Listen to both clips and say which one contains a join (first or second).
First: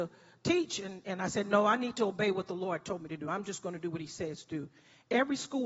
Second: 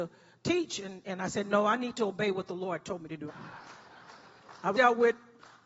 second